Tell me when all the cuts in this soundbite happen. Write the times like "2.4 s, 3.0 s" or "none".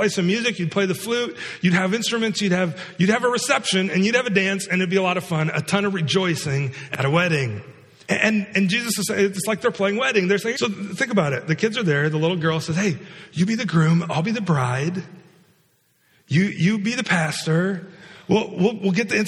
8.0 s, 10.5 s